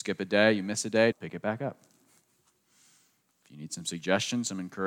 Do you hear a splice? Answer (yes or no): yes